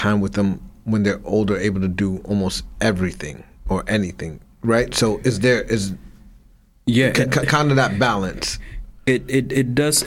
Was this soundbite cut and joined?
no; 0 cuts

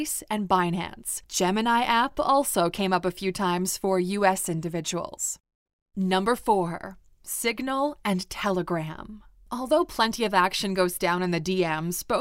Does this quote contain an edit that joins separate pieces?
no; 0 cuts

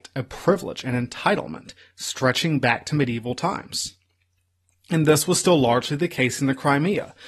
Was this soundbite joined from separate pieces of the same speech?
no; 0 cuts

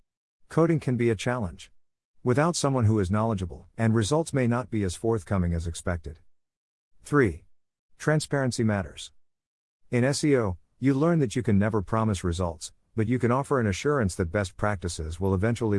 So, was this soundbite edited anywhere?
yes; 1 cut; at 3.7 s

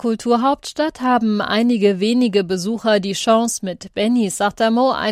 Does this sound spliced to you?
no; 0 cuts

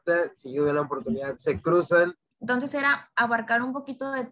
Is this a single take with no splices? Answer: no; 1 cut; at 2.3 s

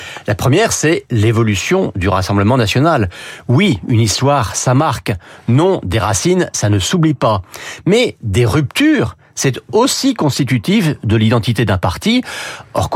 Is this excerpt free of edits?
yes; 0 cuts

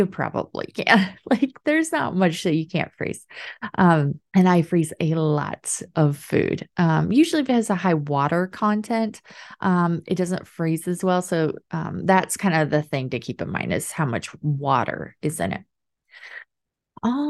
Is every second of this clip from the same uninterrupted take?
no; 1 cut; at 4.3 s

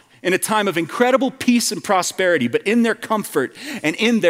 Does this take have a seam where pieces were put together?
no; 0 cuts

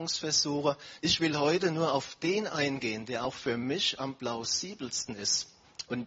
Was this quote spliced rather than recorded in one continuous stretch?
yes; 1 cut; at 1.0 s

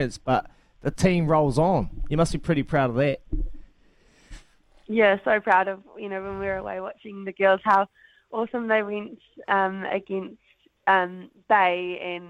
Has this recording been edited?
no; 0 cuts

